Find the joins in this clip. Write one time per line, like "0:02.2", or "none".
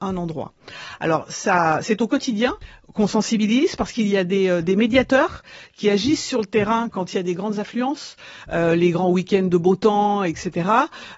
none

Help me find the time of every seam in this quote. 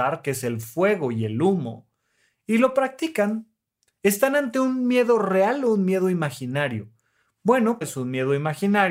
0:07.8

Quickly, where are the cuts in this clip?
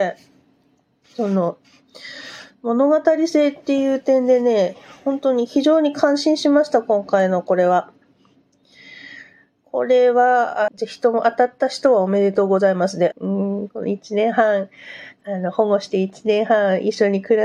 0:10.7
0:13.1
0:15.2

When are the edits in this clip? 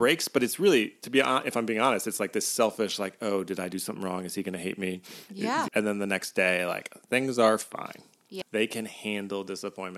0:05.7
0:08.4

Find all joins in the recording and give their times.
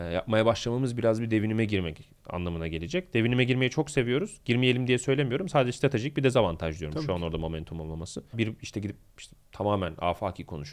0:08.3

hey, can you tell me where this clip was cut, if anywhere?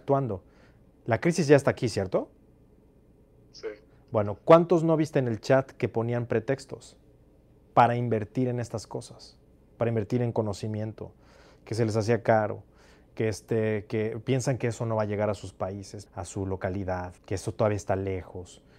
0:16.1
0:17.2

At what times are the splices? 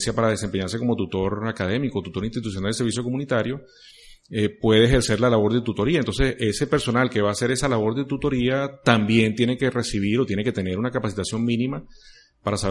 none

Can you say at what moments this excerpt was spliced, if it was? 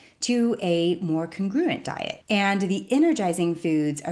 0:02.2

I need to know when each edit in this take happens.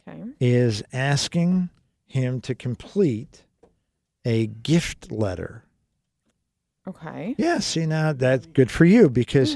none

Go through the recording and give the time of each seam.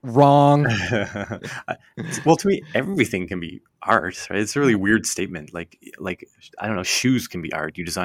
none

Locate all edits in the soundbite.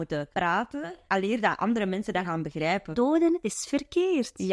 none

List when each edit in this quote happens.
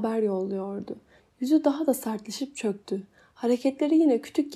0:01.2

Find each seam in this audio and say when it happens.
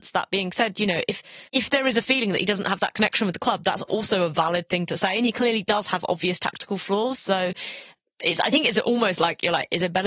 0:01.5

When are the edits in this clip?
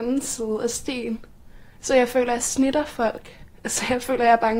none

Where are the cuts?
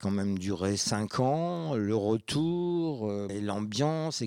0:03.3

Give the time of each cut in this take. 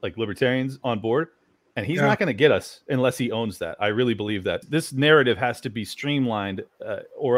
0:04.6

